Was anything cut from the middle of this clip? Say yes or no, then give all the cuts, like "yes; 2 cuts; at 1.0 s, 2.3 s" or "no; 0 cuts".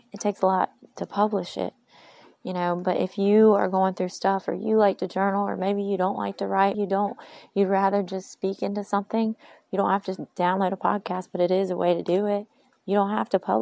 yes; 1 cut; at 6.7 s